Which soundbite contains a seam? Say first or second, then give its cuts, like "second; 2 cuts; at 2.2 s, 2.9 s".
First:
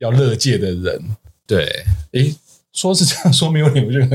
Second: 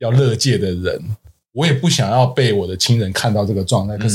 first; 1 cut; at 1.5 s